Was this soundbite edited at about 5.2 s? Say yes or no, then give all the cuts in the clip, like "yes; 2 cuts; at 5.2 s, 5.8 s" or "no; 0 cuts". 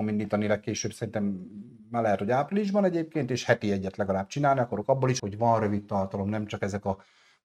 yes; 1 cut; at 5.2 s